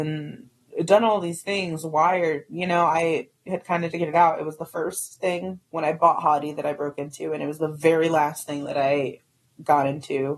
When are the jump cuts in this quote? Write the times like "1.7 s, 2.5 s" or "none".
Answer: 3.9 s, 5.6 s